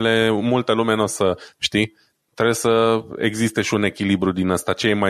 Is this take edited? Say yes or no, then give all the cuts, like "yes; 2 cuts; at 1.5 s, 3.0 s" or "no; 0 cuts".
yes; 1 cut; at 1.5 s